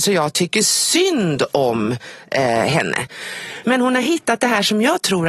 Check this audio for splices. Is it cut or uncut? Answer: cut